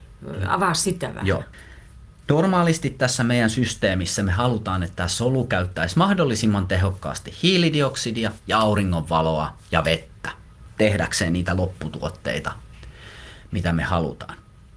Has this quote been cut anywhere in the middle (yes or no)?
no